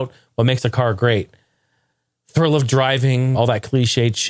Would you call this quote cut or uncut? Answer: cut